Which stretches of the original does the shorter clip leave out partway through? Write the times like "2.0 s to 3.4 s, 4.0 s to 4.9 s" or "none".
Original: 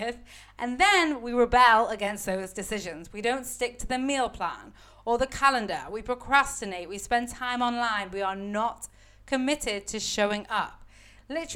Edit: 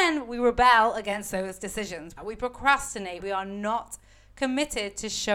3.1 s to 5.8 s, 6.9 s to 8.1 s